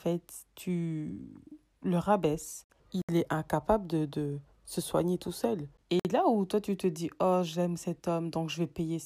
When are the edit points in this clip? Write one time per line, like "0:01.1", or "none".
0:02.8
0:05.8